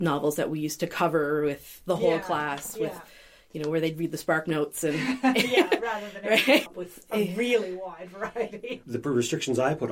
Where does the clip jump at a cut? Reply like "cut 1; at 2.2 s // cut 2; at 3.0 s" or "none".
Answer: cut 1; at 6.7 s // cut 2; at 8.8 s